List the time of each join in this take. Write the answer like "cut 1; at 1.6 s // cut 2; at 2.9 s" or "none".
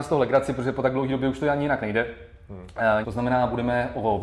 cut 1; at 3.0 s